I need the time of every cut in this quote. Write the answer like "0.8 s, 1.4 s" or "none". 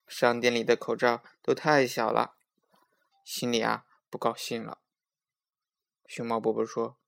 3.1 s